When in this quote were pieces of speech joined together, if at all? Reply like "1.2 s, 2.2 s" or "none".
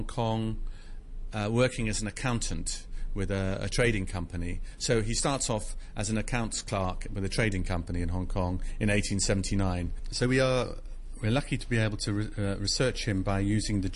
none

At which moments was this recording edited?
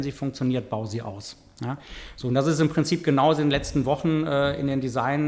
none

